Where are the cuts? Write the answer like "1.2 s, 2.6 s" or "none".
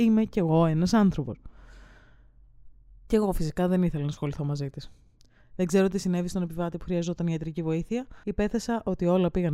3.1 s, 8.2 s